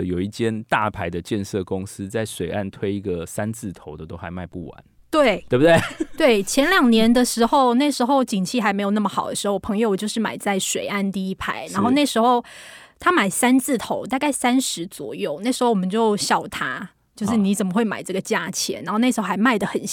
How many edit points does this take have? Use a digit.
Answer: 0